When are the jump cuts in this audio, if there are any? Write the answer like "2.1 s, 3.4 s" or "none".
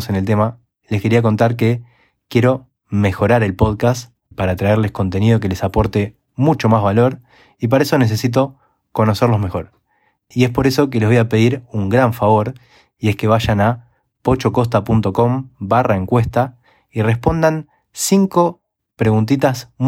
4.3 s